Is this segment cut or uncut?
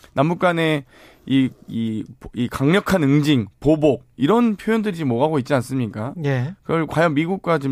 uncut